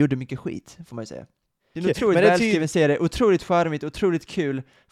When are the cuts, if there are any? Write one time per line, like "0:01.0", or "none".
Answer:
0:01.8